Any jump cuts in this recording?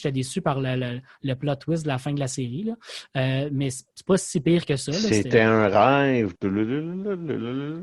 no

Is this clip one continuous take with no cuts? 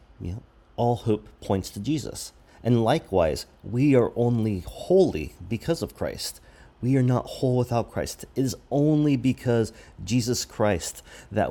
yes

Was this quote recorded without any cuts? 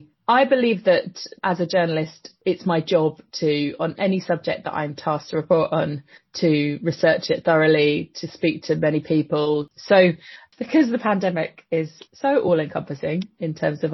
no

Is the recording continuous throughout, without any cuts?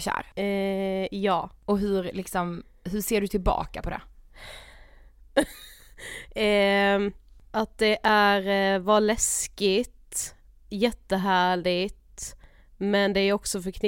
yes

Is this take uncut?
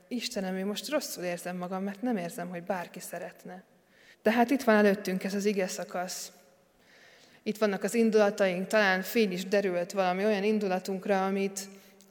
no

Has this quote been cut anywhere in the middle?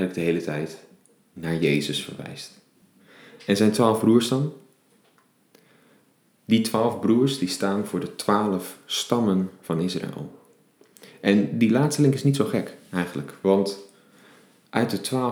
no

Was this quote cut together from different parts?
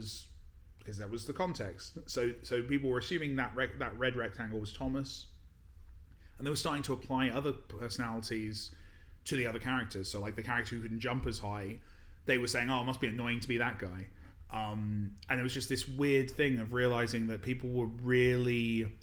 no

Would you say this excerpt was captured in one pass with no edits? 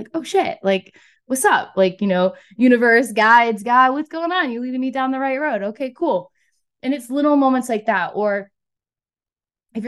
yes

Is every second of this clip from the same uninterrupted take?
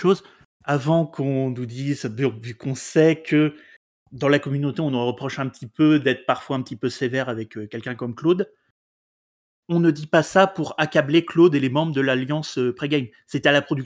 yes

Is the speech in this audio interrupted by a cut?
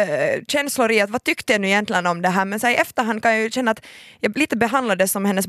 no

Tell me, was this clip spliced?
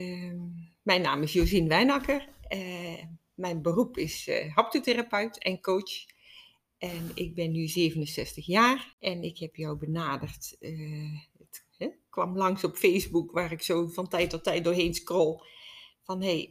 no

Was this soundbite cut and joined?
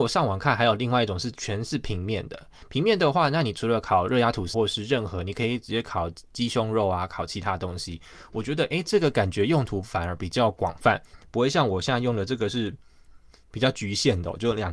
yes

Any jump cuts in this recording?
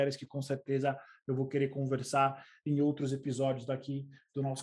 no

